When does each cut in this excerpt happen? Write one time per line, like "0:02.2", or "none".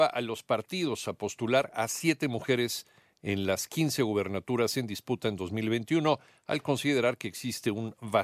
none